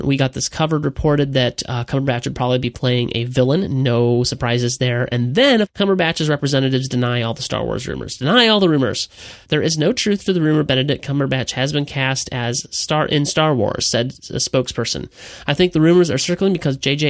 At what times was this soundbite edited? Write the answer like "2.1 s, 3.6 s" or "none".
5.6 s, 9.4 s